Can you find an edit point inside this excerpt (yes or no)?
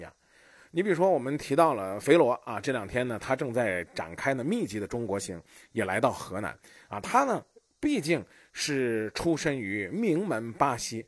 no